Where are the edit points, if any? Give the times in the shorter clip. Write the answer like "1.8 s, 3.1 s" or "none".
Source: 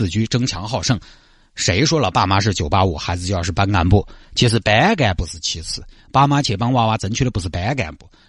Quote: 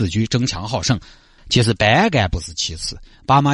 1.4 s